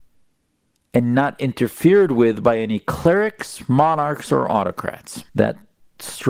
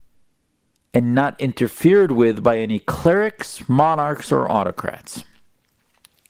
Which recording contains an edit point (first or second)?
first